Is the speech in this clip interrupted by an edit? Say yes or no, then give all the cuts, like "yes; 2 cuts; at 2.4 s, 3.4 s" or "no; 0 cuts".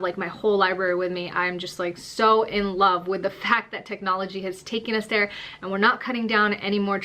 no; 0 cuts